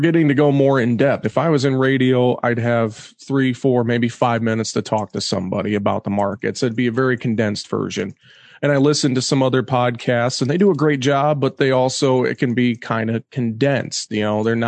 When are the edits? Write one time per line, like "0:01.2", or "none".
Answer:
0:01.2